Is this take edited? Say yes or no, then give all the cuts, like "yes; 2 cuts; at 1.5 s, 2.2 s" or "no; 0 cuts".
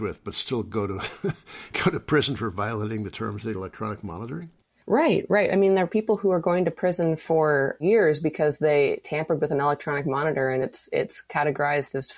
no; 0 cuts